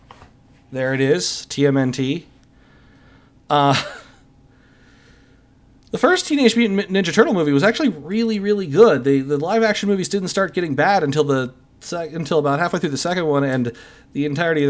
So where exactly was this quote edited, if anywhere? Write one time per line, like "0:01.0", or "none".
none